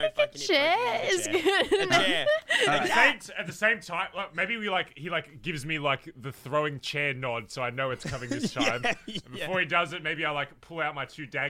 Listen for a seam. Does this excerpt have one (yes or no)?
no